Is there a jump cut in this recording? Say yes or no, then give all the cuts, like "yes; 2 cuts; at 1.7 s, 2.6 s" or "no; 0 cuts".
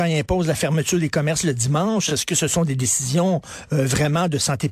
no; 0 cuts